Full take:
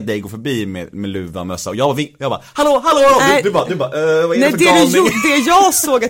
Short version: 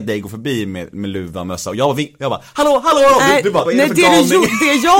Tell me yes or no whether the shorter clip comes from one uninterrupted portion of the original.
no